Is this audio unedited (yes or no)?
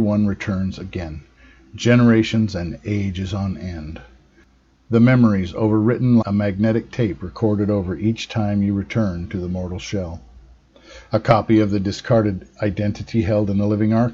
no